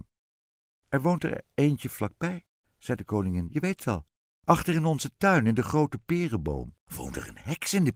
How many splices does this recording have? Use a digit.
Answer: 1